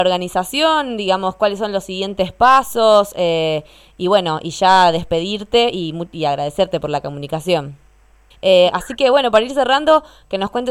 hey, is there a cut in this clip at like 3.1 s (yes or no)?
no